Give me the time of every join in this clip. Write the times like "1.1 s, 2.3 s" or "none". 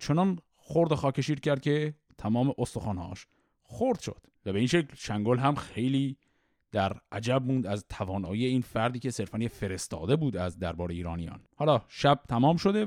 4.4 s, 11.5 s